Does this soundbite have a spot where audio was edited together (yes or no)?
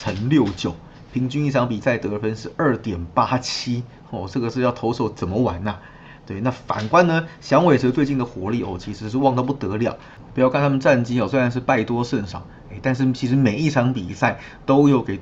no